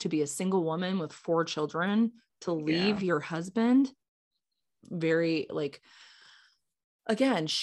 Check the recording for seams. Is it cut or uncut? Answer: cut